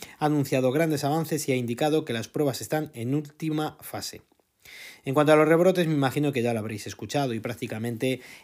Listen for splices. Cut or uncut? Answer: uncut